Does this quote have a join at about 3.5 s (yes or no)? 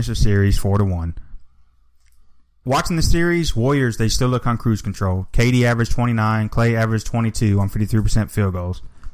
no